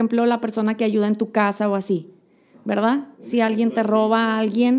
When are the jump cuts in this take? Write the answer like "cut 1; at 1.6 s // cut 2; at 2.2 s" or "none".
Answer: none